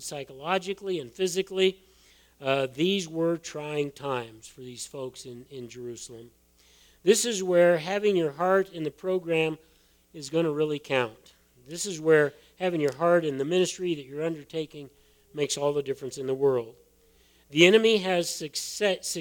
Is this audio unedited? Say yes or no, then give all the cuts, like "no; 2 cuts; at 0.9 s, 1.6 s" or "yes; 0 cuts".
yes; 0 cuts